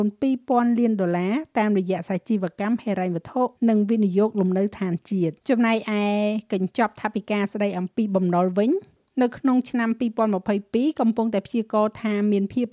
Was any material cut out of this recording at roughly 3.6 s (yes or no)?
yes